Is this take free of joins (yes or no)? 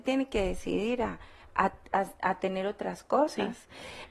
yes